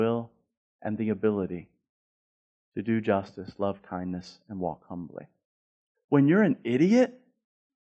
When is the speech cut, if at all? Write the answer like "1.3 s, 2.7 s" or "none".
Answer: 5.9 s

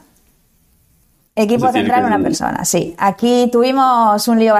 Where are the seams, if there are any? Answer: none

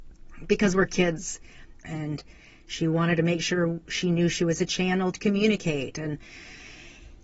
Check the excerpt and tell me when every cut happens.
1.8 s, 5.1 s

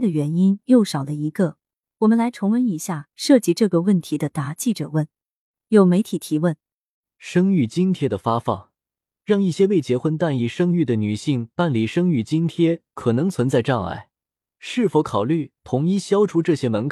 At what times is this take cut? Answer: 1.8 s, 9.2 s

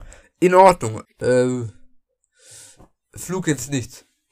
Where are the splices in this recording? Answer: 1.0 s

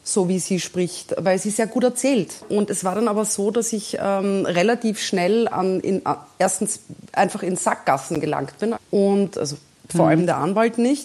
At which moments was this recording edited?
2.4 s, 8.8 s

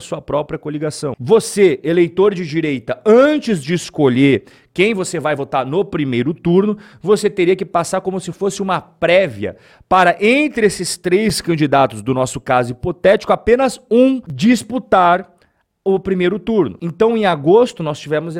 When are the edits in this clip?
1.2 s

